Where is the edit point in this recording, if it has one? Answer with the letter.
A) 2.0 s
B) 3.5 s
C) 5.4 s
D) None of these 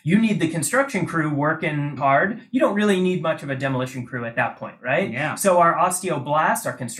A